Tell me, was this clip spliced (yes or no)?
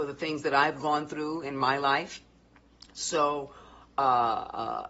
no